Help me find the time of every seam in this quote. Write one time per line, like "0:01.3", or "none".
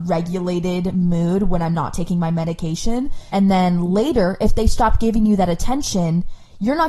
0:03.3